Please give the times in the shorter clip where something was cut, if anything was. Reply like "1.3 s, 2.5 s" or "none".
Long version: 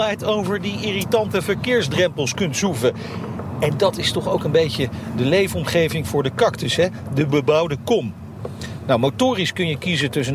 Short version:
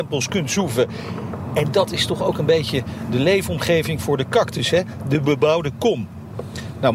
none